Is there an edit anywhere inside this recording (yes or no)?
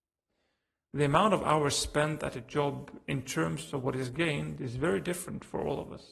no